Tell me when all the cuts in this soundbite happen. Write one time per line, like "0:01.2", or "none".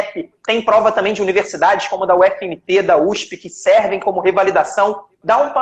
none